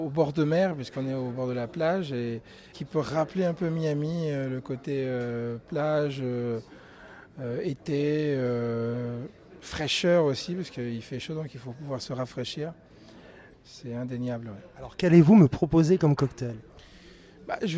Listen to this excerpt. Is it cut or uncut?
cut